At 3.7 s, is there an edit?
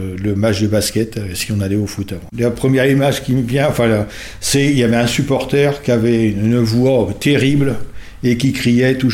no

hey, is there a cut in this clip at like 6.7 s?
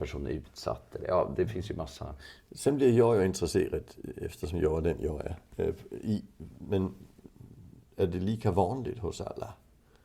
yes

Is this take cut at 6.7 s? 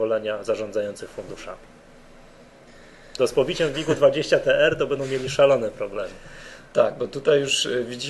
no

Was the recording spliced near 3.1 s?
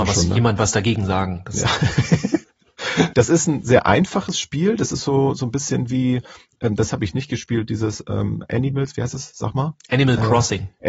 yes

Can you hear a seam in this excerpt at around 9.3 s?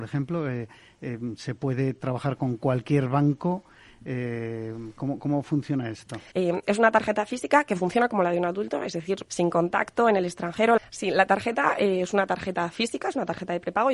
yes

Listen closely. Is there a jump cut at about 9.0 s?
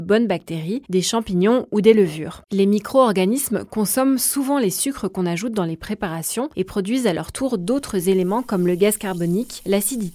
no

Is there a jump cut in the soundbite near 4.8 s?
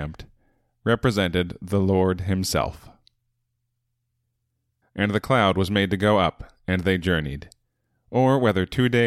yes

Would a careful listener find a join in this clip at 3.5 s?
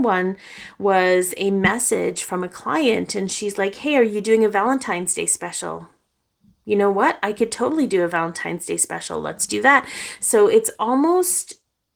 no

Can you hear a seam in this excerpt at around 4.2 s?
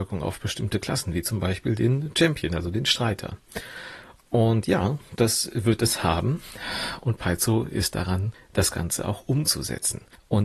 yes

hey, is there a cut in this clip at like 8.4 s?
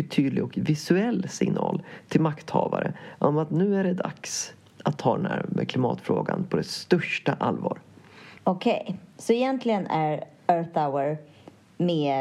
yes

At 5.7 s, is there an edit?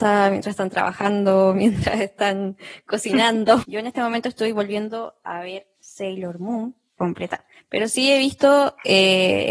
no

